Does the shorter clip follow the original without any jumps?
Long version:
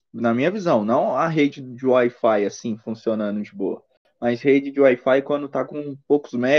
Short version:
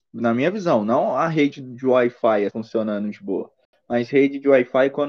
no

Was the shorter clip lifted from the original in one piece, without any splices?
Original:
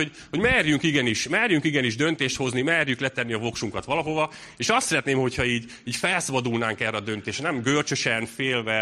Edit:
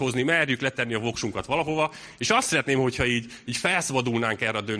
yes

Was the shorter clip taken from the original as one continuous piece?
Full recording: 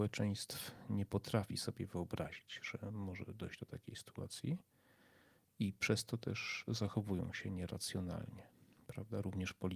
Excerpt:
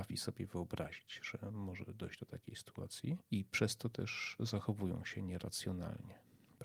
no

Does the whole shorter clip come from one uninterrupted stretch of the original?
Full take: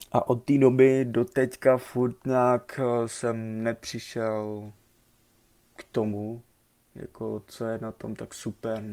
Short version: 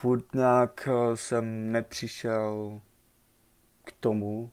yes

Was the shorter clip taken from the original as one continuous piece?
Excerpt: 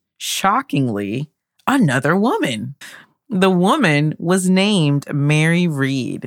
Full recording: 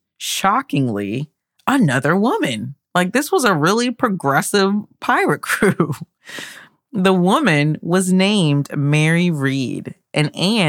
no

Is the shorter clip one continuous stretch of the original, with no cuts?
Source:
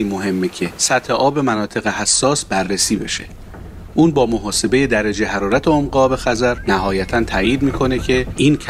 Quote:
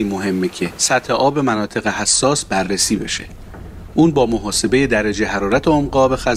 yes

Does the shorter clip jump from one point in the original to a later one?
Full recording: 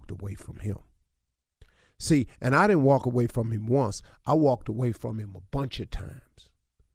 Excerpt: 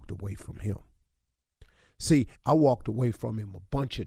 yes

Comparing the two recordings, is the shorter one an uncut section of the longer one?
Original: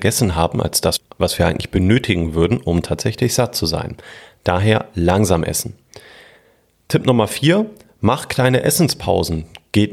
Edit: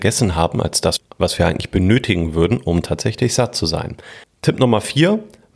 no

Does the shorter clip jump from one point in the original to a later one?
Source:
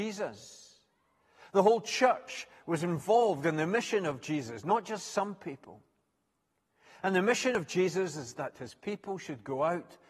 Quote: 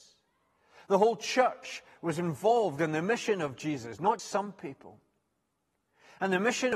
yes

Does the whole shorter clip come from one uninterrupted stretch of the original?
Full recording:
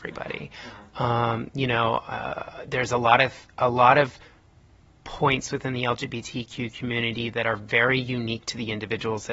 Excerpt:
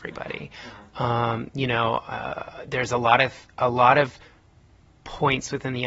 yes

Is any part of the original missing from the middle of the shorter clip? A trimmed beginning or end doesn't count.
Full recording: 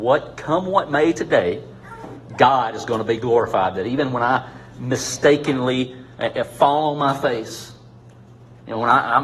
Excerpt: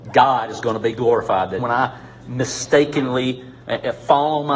yes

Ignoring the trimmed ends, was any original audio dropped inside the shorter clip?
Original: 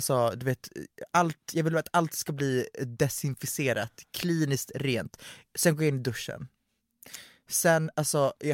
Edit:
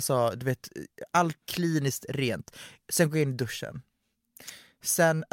yes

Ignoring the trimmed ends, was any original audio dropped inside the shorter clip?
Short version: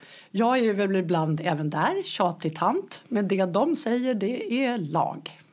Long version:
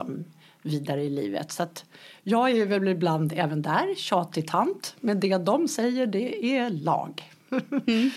no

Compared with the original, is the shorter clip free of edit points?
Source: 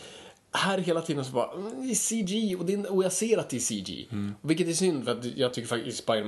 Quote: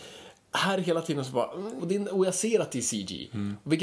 no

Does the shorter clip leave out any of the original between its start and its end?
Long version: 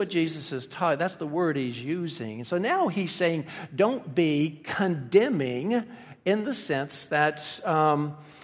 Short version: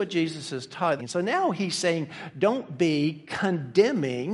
yes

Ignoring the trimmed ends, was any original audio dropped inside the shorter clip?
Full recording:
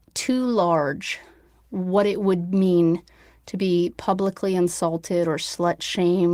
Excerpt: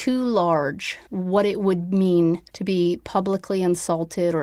yes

